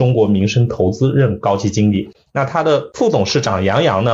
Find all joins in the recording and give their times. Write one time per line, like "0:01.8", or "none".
0:02.3